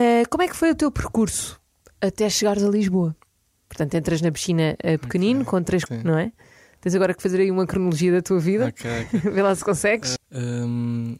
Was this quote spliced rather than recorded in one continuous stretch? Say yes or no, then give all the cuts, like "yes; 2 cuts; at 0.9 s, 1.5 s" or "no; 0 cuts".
yes; 2 cuts; at 5.9 s, 10.2 s